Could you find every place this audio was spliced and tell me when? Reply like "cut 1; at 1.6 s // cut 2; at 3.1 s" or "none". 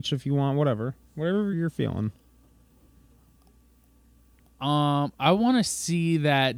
cut 1; at 1.5 s